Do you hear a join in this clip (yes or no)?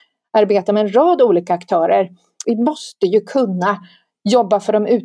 yes